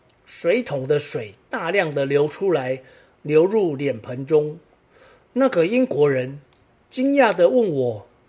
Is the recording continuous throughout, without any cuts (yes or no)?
yes